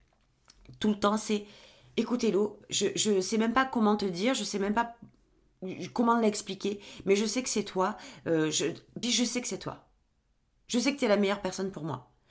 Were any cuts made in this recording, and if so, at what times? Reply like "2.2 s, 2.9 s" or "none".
9.0 s